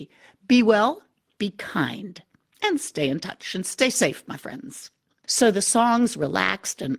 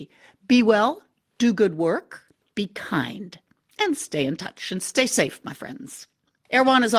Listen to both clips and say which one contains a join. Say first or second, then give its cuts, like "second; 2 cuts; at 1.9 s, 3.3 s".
first; 2 cuts; at 1.3 s, 5.2 s